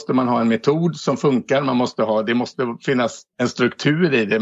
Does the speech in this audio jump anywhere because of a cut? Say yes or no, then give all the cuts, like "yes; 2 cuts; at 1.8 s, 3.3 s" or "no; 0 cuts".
yes; 1 cut; at 3.3 s